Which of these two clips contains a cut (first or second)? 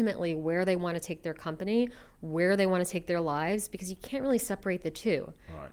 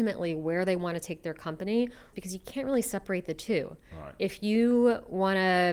second